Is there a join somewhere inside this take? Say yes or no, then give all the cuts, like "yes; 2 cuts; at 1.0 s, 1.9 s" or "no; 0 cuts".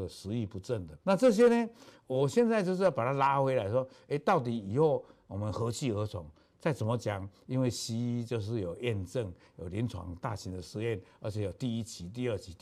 yes; 1 cut; at 1.0 s